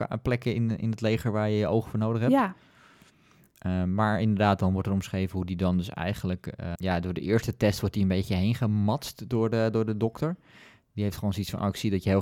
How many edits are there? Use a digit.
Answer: 1